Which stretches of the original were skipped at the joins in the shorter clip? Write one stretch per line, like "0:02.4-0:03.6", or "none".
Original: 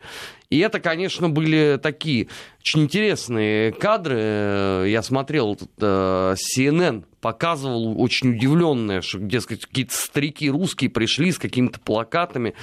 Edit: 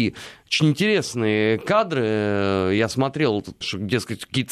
0:05.7-0:09.0

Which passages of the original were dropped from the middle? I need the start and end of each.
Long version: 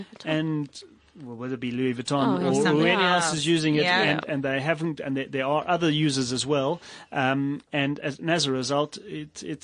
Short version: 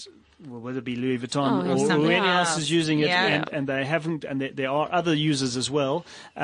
none

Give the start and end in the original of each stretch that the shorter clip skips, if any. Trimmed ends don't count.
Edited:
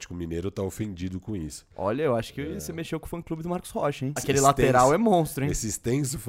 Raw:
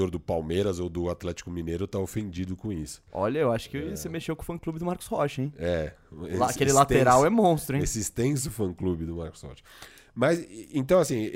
0:05.5-0:06.5

